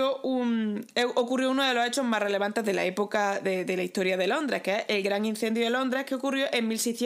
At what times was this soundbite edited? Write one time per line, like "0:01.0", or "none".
none